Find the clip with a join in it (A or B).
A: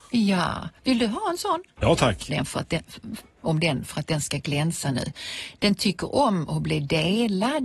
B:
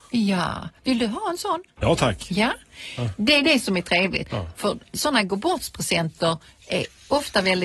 A